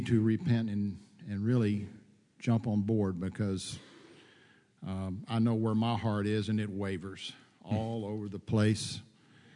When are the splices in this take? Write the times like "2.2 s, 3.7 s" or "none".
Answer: none